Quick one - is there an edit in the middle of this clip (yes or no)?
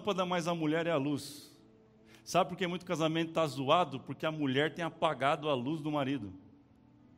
no